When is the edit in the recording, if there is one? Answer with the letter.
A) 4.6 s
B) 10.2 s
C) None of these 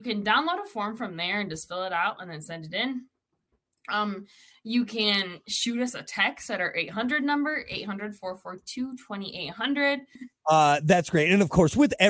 B